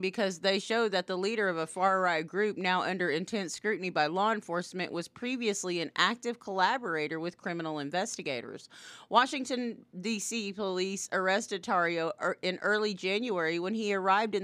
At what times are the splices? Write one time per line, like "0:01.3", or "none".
none